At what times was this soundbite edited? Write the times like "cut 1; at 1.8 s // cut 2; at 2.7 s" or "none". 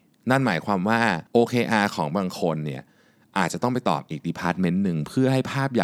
cut 1; at 1.3 s